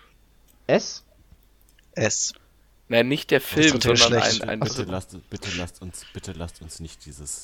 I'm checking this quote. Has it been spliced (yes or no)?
no